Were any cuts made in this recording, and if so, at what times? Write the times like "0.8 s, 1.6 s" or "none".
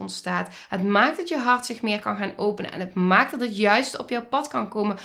none